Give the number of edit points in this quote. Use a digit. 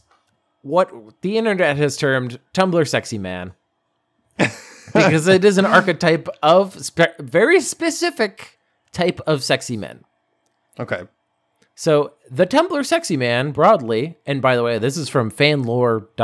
0